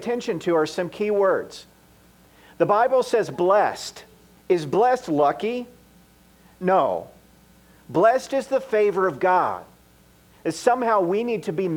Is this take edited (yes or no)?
yes